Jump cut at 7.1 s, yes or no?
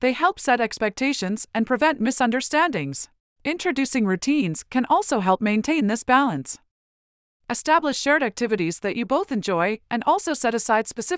no